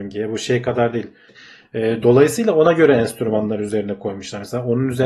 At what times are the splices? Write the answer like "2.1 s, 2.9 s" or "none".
1.3 s